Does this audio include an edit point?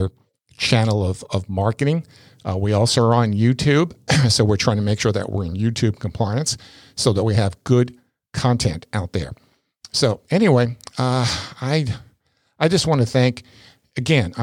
no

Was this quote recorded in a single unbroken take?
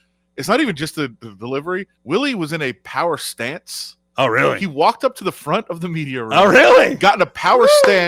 no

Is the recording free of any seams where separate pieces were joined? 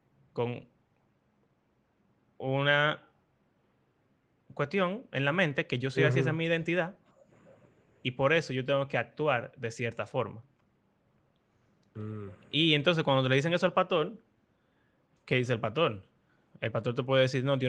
yes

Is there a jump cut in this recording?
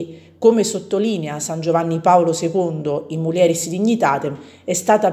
no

